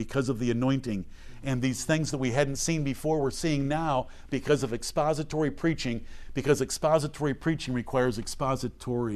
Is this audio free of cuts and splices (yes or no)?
yes